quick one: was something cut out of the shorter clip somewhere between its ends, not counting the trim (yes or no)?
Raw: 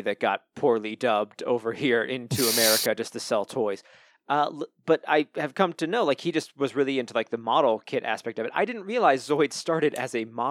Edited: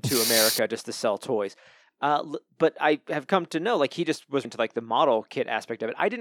yes